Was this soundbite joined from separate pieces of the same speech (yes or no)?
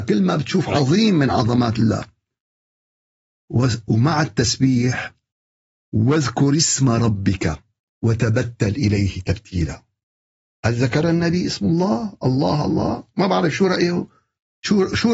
no